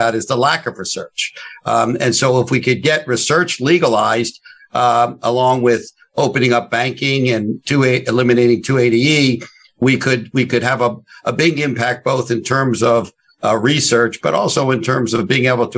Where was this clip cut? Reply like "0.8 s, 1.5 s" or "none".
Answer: none